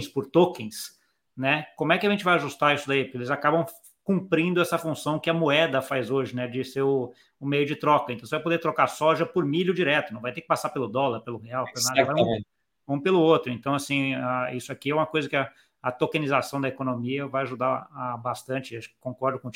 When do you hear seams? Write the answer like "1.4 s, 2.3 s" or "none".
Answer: none